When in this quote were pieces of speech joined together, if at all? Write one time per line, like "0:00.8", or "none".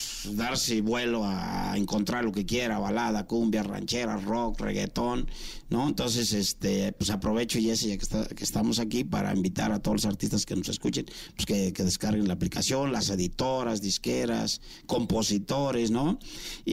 none